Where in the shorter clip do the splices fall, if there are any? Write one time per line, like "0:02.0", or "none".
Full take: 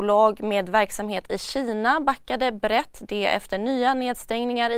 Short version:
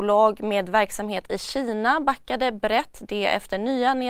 none